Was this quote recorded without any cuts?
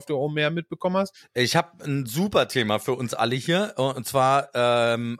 yes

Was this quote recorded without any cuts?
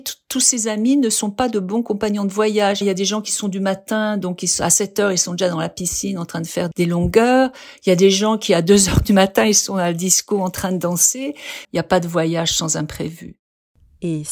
no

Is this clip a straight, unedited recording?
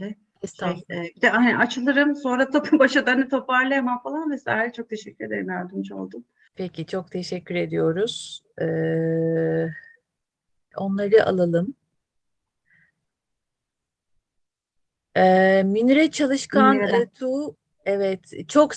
no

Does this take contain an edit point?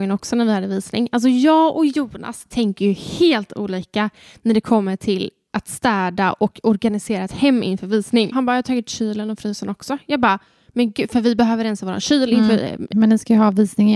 yes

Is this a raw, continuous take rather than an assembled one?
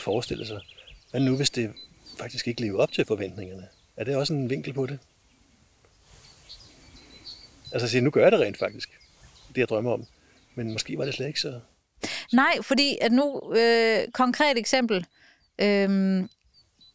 yes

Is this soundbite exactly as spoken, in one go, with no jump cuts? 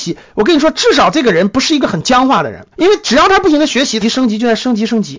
no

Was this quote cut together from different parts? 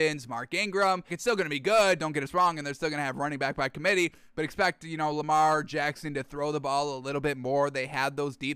yes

